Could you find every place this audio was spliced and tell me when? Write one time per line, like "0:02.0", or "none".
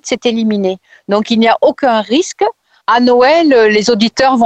0:02.8